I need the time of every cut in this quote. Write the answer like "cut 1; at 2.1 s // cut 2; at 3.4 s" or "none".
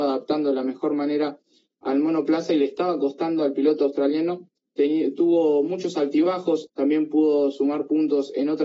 cut 1; at 4.6 s // cut 2; at 6.7 s